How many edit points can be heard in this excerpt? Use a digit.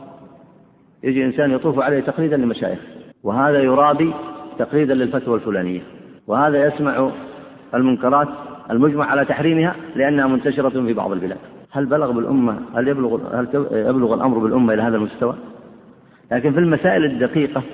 3